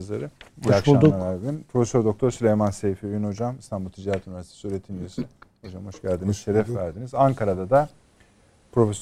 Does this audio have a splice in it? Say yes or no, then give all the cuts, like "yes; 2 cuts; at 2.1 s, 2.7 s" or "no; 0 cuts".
no; 0 cuts